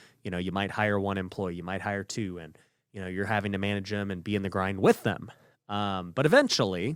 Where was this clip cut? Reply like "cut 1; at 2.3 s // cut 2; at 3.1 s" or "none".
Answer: none